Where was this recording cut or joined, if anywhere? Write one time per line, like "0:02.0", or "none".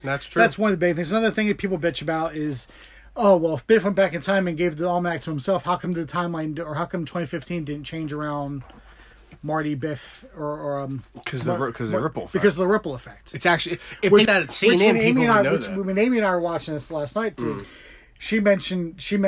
0:14.3
0:17.6

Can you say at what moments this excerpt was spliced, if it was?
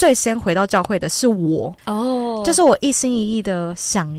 0:01.8

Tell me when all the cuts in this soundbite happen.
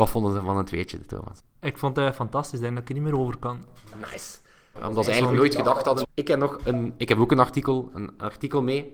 0:04.8
0:06.0

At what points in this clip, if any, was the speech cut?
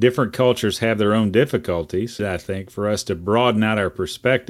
0:02.2

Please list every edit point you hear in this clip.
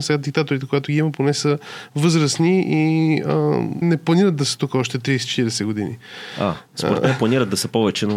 0:03.8

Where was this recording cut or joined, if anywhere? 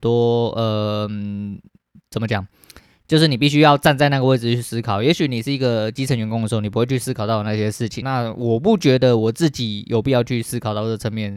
0:08.0

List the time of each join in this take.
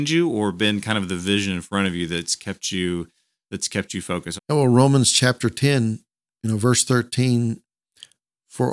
0:04.4

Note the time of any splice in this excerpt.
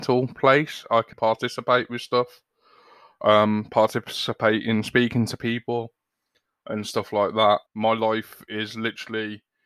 0:01.1
0:07.7

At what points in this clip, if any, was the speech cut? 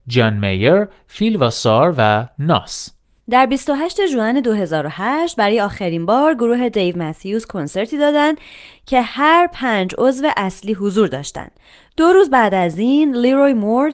none

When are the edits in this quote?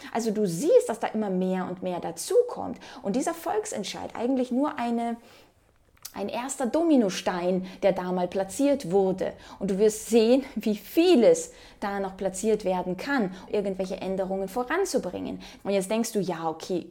0:06.1
0:13.5
0:15.6

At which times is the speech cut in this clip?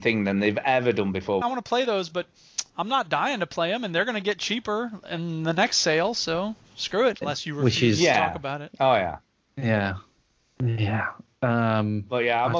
0:01.4
0:07.2

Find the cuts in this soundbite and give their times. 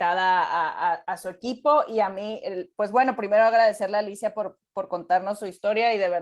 none

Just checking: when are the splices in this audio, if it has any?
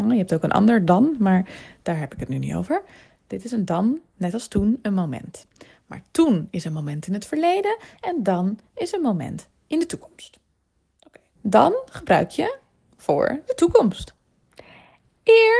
0:11.4

